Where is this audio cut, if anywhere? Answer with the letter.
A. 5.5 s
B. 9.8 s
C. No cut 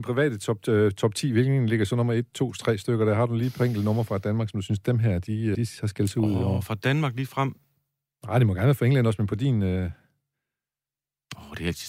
A